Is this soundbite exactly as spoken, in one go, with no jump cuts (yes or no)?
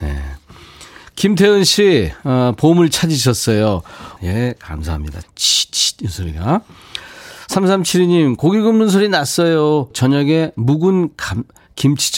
no